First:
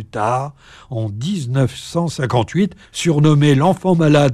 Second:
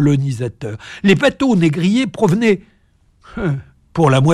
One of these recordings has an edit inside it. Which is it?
first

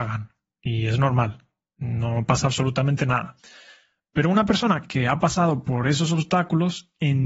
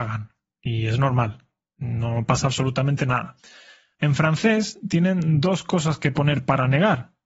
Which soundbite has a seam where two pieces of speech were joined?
second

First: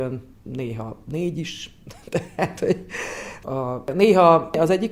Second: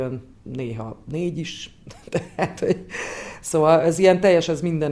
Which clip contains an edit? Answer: first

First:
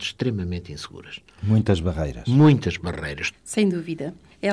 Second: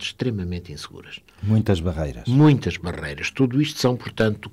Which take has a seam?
first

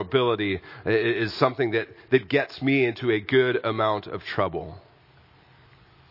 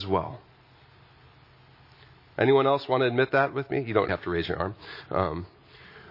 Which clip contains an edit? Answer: second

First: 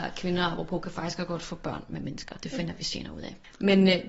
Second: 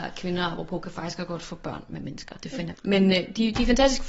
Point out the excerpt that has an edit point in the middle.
second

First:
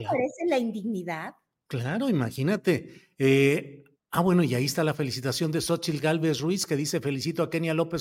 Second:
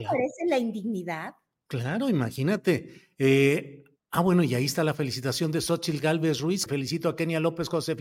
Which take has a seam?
second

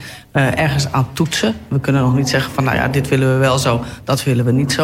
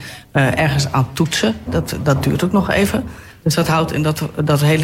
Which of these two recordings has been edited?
second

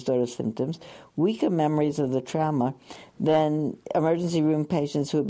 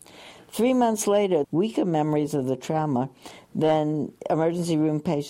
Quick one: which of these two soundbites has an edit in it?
second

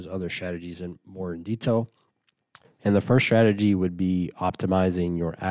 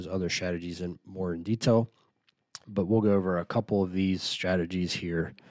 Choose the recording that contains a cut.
first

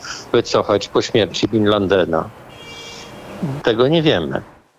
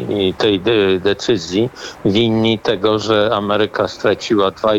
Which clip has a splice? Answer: first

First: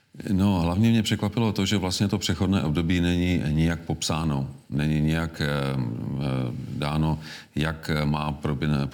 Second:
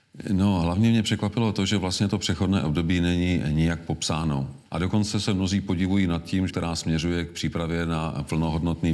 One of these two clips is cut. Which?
second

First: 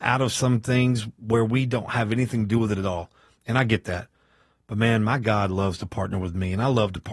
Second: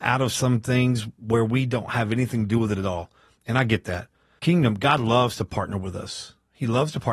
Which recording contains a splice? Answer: second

